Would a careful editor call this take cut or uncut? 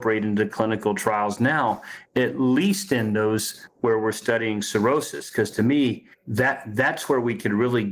uncut